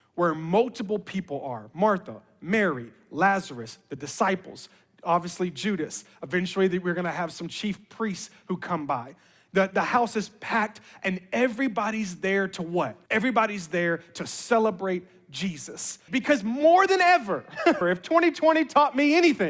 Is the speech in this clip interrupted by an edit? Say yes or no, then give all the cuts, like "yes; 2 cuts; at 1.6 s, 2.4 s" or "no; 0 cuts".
yes; 3 cuts; at 13.1 s, 16.1 s, 17.8 s